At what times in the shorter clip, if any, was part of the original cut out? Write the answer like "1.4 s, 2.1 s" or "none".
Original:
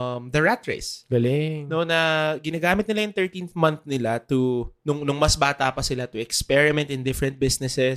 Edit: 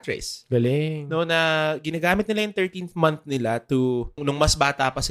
4.2 s